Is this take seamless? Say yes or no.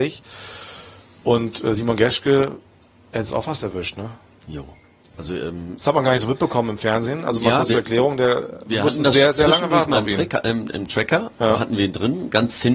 yes